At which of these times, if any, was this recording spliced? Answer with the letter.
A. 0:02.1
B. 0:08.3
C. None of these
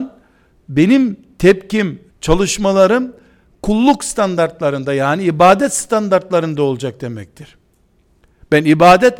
A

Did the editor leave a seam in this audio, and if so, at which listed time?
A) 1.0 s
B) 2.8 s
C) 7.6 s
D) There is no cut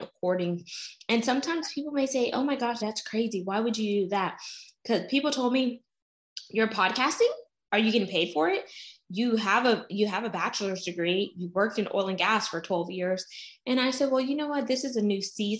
B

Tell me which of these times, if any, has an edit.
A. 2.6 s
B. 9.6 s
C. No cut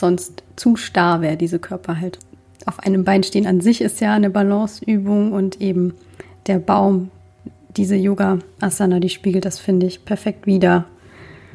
C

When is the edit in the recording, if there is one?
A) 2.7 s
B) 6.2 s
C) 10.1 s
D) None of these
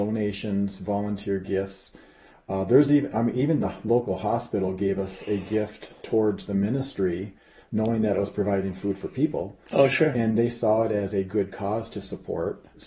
D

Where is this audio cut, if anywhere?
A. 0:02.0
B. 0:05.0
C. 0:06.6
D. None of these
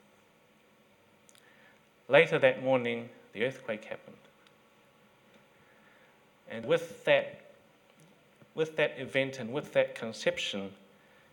C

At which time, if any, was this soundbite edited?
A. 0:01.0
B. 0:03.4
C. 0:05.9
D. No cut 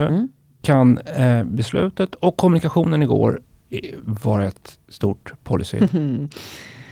D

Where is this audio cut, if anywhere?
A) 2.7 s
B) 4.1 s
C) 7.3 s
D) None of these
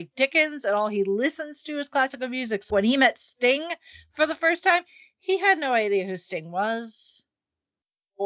A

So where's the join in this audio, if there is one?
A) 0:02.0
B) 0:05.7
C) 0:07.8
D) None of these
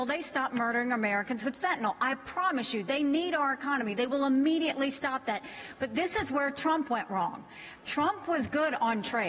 D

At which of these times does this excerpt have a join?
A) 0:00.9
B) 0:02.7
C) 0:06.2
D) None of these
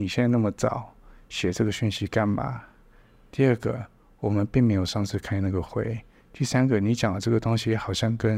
D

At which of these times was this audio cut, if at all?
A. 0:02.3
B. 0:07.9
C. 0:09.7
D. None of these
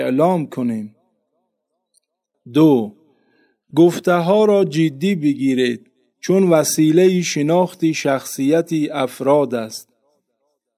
A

